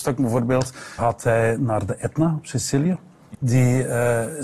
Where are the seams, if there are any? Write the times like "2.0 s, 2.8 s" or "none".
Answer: 1.0 s, 3.3 s